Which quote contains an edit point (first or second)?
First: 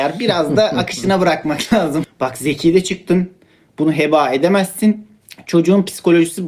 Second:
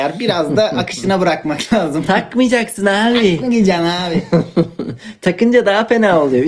first